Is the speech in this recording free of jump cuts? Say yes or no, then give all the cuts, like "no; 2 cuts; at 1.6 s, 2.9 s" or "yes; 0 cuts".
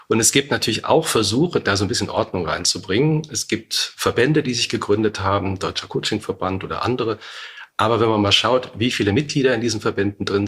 yes; 0 cuts